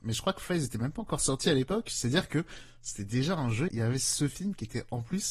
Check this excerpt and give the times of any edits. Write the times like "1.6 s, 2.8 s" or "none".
3.7 s